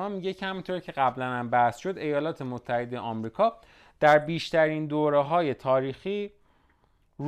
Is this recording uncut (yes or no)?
yes